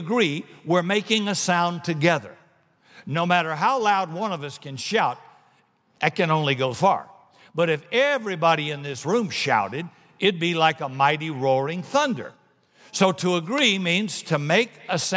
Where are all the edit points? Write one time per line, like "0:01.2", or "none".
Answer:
0:06.7